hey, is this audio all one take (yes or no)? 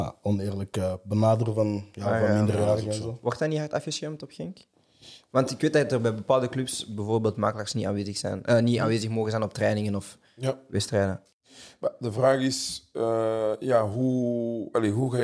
yes